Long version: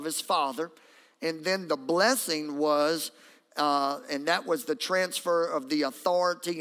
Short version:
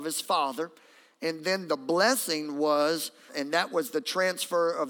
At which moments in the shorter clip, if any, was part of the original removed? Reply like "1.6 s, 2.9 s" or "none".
3.3 s